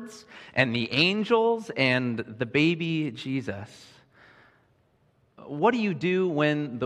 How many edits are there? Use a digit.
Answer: 1